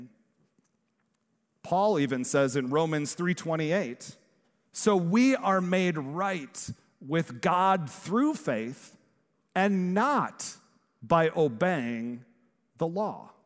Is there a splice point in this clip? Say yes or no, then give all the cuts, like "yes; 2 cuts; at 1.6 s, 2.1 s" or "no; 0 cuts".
no; 0 cuts